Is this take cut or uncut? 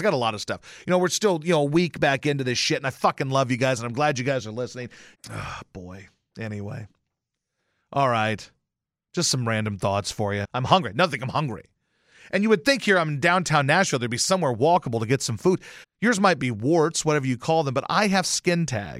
cut